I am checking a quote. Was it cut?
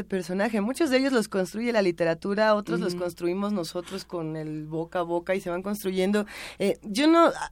no; 0 cuts

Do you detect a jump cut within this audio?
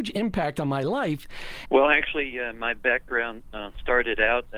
yes; 1 cut; at 1.7 s

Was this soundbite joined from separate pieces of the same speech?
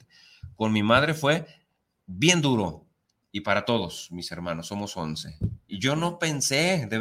yes; 1 cut; at 5.7 s

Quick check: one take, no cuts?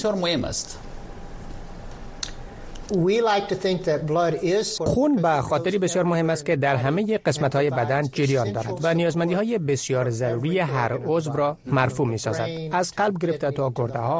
no; 2 cuts; at 2.9 s, 4.8 s

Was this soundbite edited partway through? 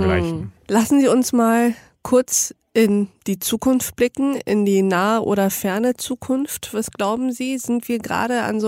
no; 0 cuts

